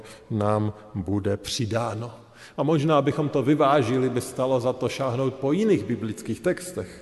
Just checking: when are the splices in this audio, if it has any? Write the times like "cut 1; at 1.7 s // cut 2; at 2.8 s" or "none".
none